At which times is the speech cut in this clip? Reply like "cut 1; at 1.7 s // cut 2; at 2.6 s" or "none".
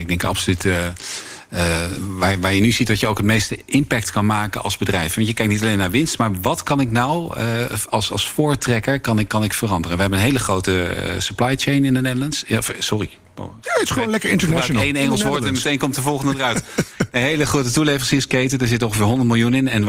none